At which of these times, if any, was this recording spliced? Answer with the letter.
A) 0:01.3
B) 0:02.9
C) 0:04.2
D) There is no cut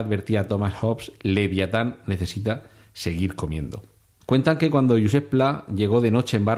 C